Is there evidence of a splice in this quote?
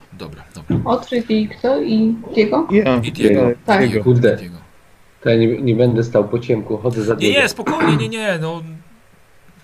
no; 0 cuts

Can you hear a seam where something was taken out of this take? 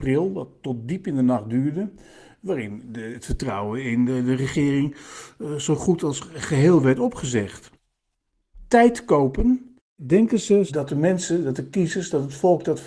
no; 0 cuts

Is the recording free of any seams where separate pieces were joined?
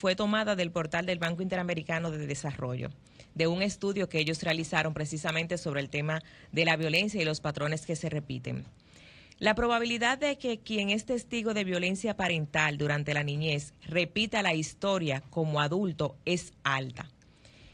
yes; 0 cuts

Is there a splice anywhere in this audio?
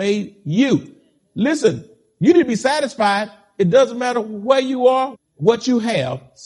yes; 1 cut; at 5.1 s

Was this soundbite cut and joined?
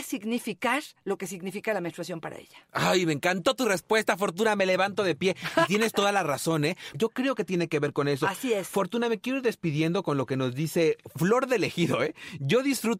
yes; 1 cut; at 6.9 s

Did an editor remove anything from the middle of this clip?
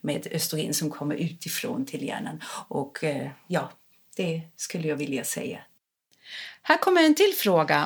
no; 0 cuts

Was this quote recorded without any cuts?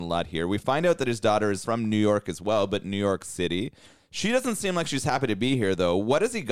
yes; 0 cuts

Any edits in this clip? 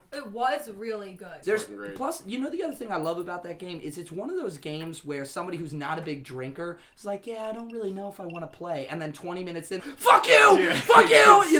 yes; 2 cuts; at 1.4 s, 9.8 s

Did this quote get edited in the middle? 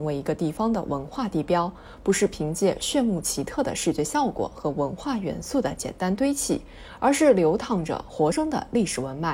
yes; 1 cut; at 8.3 s

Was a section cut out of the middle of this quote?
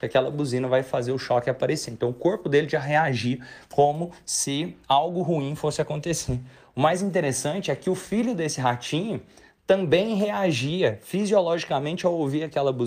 no; 0 cuts

